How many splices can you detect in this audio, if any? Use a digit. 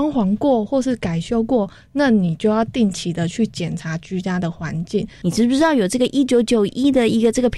1